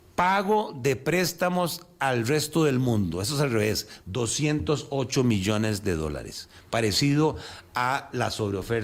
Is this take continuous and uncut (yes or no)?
no